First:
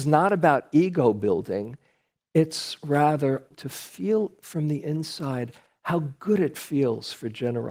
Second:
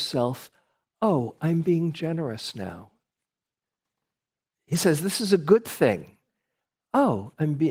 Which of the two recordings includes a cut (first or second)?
first